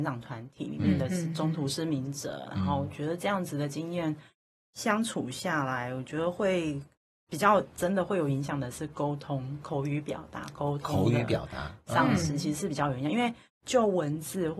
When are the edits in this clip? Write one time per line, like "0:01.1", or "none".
none